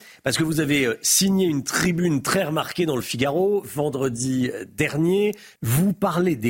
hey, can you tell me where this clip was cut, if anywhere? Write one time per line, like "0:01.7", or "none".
0:05.6